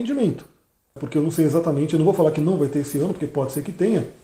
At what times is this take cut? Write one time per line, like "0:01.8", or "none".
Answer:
0:01.0